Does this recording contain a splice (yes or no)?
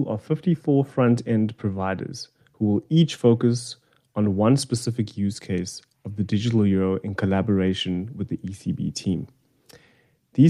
no